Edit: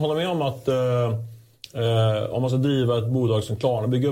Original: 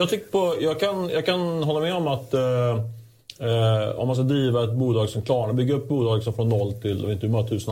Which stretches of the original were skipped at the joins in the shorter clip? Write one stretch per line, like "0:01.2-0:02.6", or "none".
none